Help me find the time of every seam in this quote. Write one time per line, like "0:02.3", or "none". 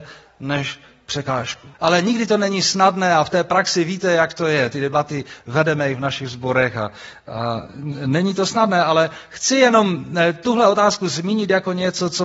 0:01.7